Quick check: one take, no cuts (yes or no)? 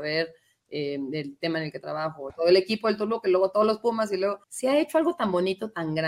no